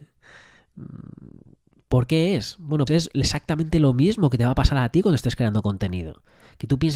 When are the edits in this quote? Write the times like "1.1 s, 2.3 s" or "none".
2.9 s